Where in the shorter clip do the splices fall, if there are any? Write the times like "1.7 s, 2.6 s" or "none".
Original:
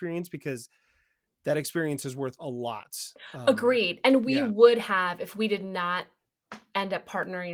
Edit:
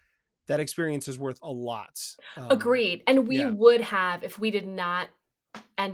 none